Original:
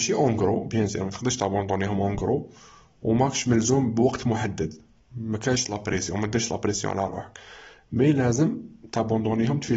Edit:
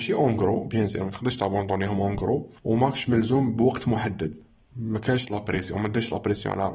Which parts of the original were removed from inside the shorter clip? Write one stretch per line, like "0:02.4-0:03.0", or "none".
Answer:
0:02.6-0:03.0